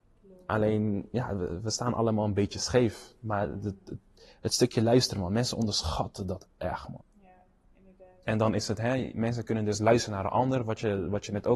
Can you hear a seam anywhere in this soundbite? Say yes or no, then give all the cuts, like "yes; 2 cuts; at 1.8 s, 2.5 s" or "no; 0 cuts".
yes; 1 cut; at 7.0 s